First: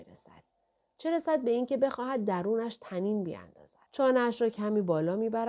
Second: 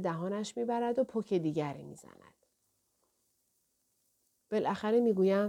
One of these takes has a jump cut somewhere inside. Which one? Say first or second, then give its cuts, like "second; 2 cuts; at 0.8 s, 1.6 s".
first; 1 cut; at 3.9 s